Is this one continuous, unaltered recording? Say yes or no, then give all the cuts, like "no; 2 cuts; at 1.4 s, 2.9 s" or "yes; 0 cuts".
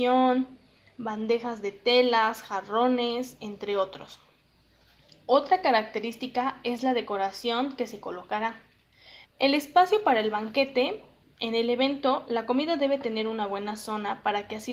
no; 1 cut; at 9.2 s